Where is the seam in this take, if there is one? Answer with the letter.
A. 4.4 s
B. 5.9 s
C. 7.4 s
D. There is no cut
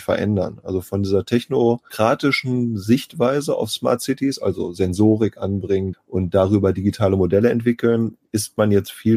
B